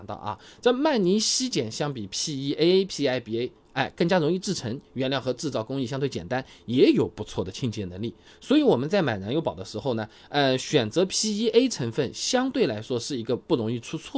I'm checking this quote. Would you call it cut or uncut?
cut